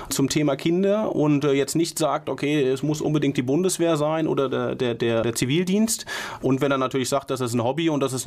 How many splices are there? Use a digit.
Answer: 1